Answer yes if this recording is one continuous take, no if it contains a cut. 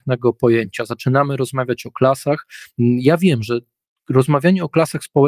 yes